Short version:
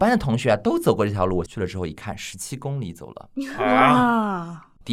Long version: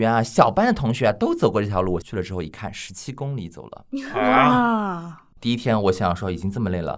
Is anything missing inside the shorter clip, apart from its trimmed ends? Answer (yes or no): no